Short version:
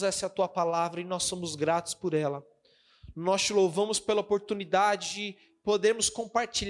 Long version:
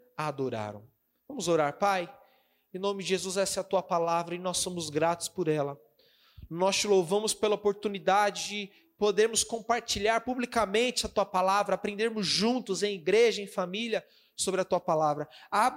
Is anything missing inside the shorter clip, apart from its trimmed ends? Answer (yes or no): no